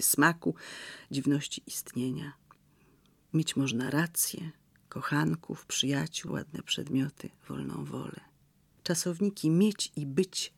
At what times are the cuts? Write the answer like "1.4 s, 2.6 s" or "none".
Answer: 6.3 s, 8.8 s